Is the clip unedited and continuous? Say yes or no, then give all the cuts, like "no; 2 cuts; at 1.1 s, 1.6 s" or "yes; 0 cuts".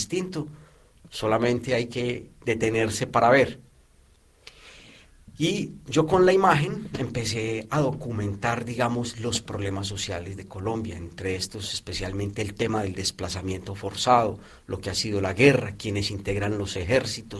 yes; 0 cuts